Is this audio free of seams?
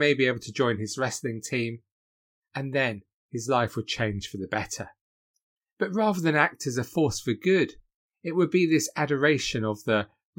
yes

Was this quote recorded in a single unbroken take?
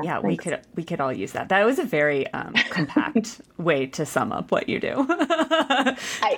yes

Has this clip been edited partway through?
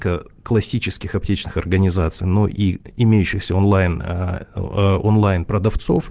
no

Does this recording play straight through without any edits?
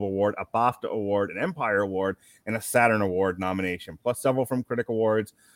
yes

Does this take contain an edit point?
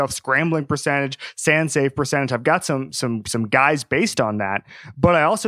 no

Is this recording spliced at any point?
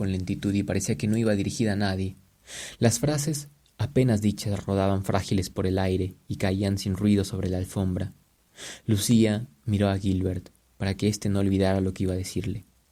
no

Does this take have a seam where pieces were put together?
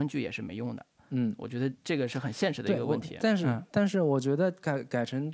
no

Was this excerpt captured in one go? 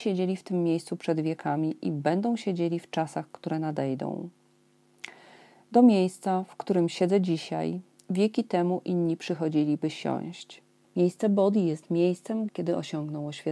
no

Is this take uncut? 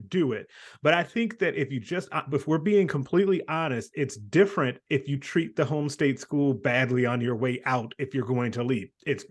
yes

